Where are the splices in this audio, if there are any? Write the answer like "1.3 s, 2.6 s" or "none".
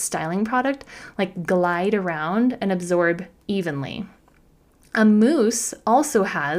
none